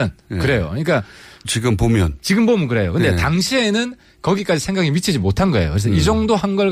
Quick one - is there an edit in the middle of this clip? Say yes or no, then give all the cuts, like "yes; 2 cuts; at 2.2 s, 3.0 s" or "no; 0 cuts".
yes; 1 cut; at 1.4 s